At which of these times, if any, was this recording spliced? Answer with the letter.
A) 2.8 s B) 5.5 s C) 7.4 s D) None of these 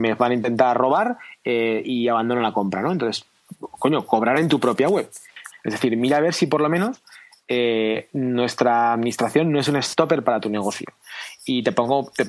B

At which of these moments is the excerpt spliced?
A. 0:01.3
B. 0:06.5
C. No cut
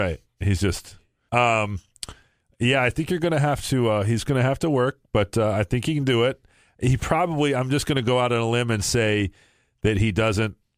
A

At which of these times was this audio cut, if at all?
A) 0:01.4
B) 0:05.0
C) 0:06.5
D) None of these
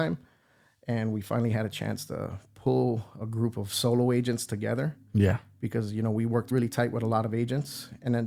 C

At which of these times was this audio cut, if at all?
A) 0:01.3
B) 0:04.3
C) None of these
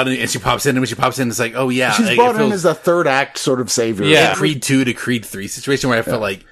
B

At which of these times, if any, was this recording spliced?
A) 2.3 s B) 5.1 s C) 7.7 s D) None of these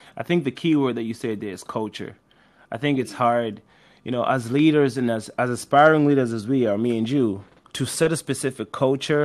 C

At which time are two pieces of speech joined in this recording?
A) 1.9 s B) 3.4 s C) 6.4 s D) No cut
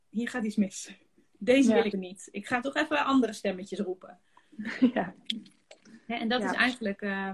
A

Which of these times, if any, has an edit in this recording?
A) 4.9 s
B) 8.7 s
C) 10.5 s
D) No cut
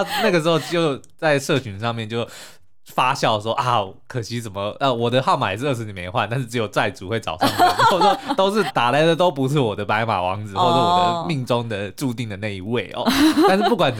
B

